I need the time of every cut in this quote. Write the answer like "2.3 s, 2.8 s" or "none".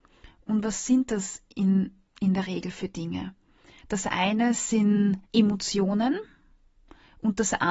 3.8 s, 5.2 s